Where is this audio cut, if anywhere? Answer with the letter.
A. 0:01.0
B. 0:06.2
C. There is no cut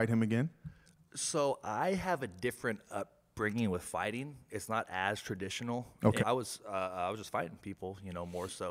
B